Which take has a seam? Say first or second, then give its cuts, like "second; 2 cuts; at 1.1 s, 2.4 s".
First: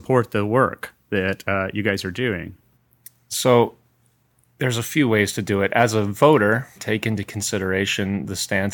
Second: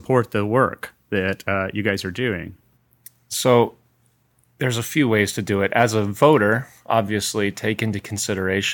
first; 1 cut; at 6.8 s